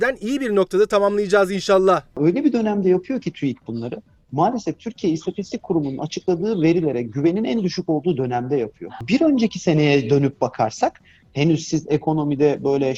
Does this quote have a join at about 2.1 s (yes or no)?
no